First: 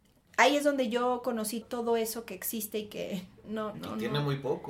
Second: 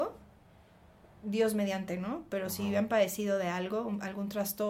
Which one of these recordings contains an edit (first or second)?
first